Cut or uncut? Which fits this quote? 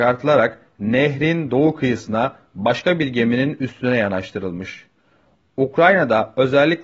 uncut